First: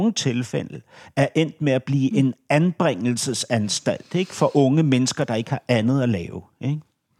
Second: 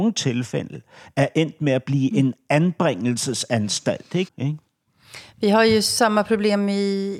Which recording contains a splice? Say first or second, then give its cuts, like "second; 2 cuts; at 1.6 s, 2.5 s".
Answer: second; 1 cut; at 4.3 s